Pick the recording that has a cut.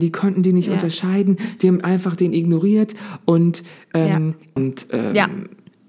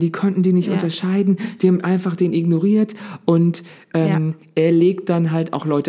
first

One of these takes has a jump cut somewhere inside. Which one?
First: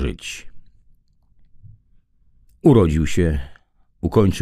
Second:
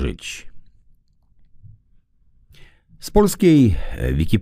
first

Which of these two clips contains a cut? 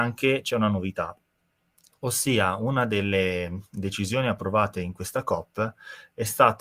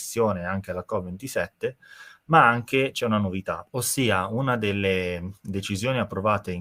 second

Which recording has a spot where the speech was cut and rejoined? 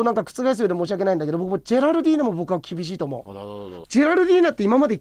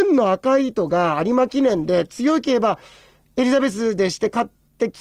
first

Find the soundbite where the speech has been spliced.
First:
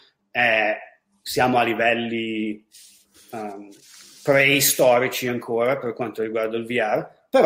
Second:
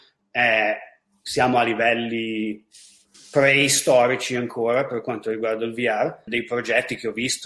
second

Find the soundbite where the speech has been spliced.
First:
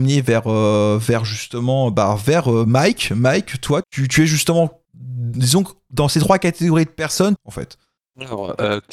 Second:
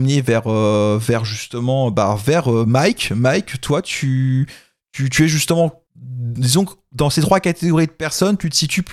first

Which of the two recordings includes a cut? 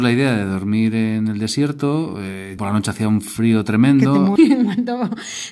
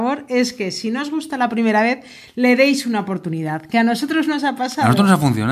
first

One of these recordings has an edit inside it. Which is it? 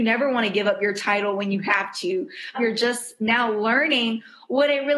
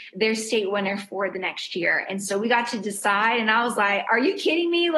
first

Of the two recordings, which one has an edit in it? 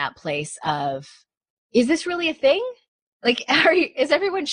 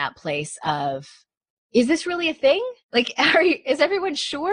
second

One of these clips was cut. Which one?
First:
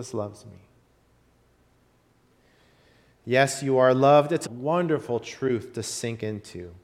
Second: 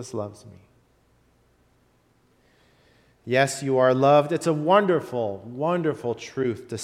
first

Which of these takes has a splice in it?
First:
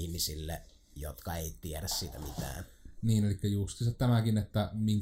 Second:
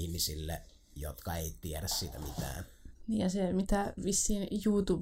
second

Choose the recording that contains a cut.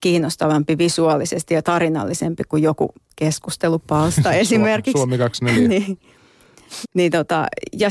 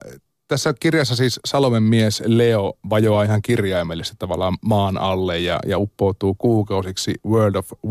first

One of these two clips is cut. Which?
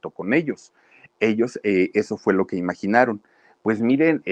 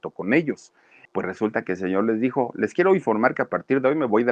second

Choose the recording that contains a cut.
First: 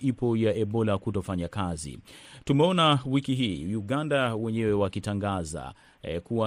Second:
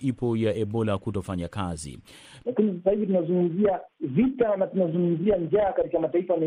second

